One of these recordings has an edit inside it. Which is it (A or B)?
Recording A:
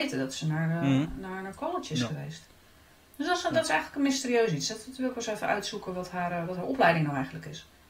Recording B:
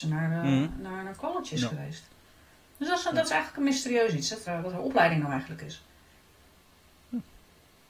B